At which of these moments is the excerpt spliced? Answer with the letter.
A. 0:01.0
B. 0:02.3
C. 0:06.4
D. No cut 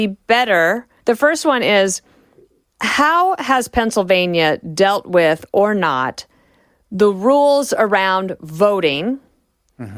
A